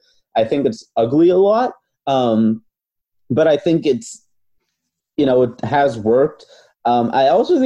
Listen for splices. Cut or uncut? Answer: uncut